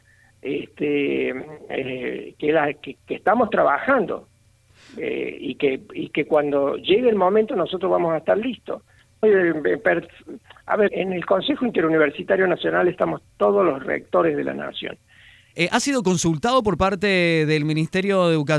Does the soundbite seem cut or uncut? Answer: cut